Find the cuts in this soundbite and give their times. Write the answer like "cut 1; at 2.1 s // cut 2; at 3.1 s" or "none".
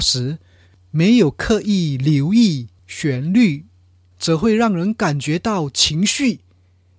cut 1; at 4.1 s

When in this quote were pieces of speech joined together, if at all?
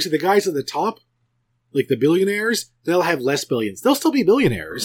none

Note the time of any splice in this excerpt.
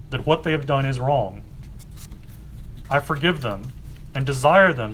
cut 1; at 2.8 s

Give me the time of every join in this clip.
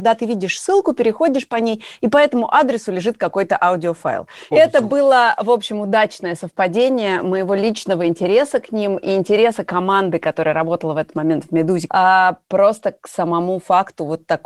cut 1; at 4.5 s // cut 2; at 11.9 s

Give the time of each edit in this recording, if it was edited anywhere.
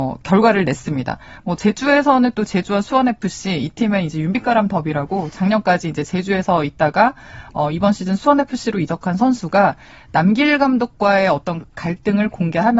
none

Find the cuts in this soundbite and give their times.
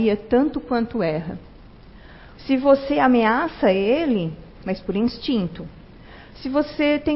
cut 1; at 2.4 s // cut 2; at 4.6 s

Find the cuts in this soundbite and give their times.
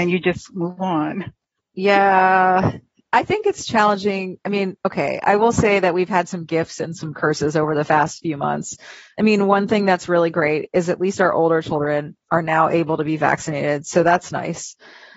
none

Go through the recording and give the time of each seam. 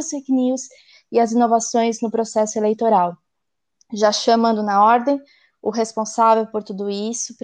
none

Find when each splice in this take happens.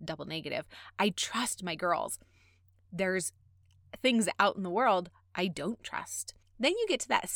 cut 1; at 6.4 s

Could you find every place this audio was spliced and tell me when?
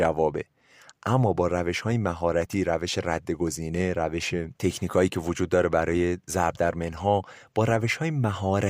cut 1; at 4.6 s

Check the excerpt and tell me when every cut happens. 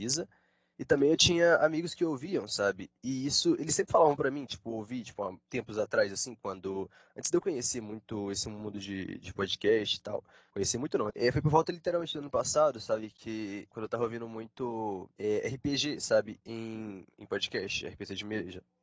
cut 1; at 11.1 s // cut 2; at 13.7 s

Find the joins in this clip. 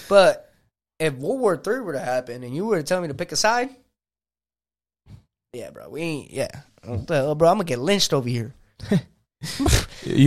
none

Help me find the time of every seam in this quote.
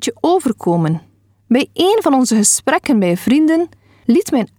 cut 1; at 1.3 s

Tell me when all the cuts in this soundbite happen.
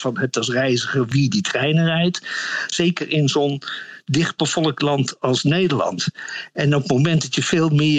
cut 1; at 2.7 s

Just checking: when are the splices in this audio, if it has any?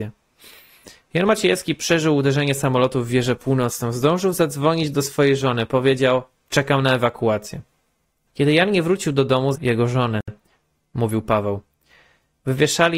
cut 1; at 6.4 s // cut 2; at 8.3 s // cut 3; at 9.5 s

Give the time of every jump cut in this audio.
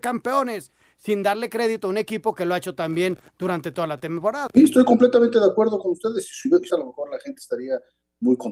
cut 1; at 4.5 s // cut 2; at 6.7 s

